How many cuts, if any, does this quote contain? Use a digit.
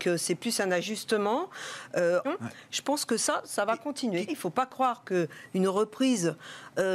2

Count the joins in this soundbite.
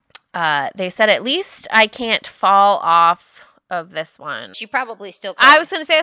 1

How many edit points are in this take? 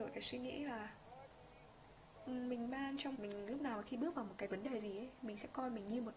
1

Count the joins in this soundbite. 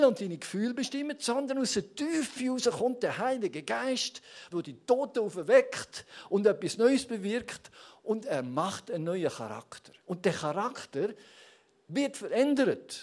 2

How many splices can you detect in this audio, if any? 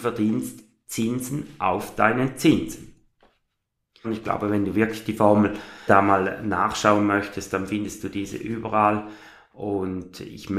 2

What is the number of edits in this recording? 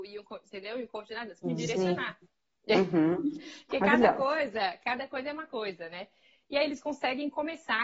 1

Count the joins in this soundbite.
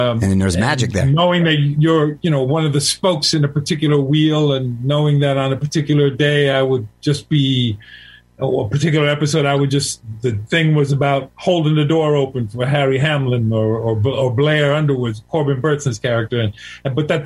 0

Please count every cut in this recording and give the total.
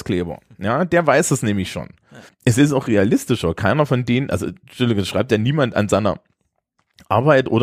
1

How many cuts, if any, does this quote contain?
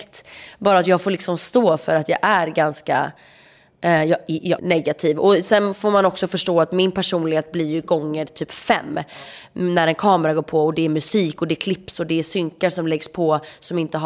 1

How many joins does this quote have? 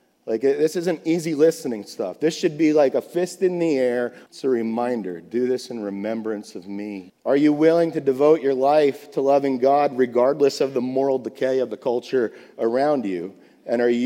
2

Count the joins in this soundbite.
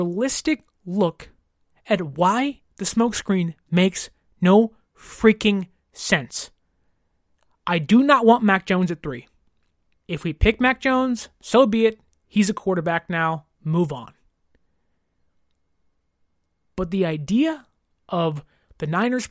1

